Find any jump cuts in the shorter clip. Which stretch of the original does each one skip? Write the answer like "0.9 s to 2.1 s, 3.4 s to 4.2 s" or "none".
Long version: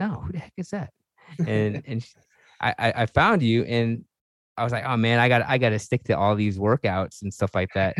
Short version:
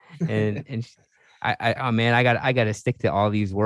2.9 s to 4.8 s

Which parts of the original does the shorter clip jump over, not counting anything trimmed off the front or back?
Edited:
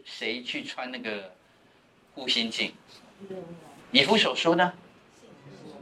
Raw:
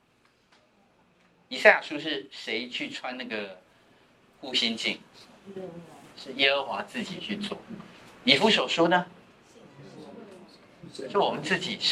6.1 s to 8.1 s

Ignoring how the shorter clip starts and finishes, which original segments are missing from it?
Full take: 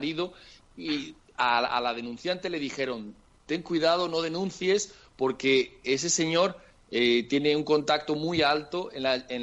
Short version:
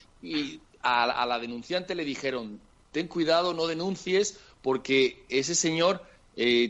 none

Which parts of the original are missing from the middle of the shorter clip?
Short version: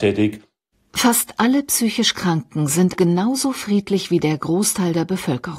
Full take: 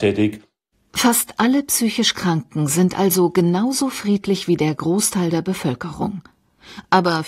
2.9 s to 3.3 s

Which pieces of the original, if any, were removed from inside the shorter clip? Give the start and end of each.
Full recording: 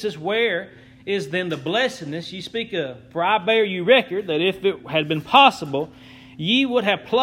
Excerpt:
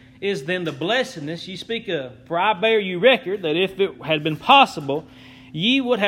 none

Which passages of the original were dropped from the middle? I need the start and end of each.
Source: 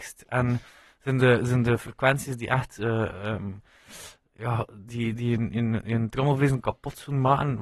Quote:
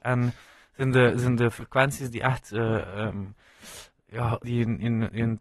4.7 s to 5.2 s

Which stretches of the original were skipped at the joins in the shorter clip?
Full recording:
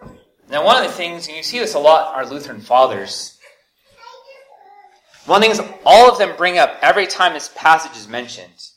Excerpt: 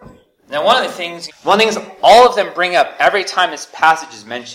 1.3 s to 5.1 s

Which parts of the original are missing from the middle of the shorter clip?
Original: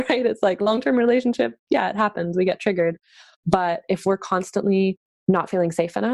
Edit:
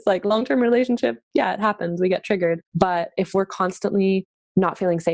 3.0 s to 3.4 s

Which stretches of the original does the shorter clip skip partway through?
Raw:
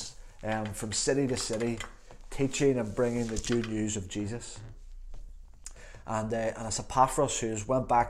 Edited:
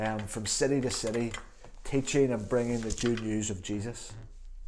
none

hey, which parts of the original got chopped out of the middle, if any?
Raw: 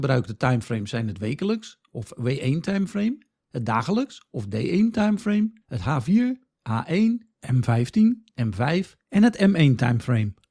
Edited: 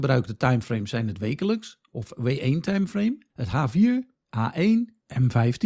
3.3 s to 5.6 s

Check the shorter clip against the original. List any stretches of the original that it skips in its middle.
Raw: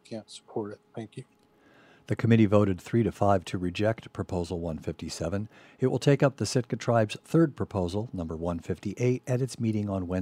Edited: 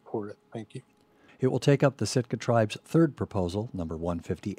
1.7 s to 5.7 s

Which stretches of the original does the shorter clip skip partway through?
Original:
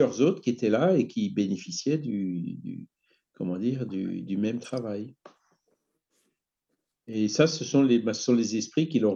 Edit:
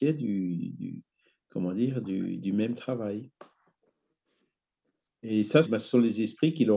7.5 s to 8.0 s

